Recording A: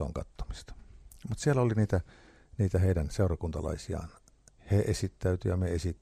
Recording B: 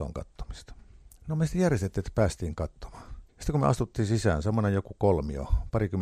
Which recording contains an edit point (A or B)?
B